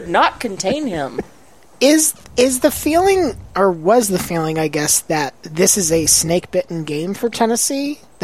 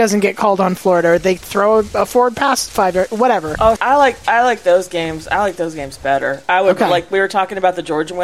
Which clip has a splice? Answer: second; 2 cuts; at 1.4 s, 3.8 s

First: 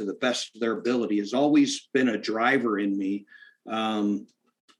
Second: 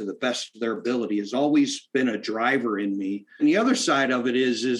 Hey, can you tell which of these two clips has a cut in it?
second; 1 cut; at 3.4 s

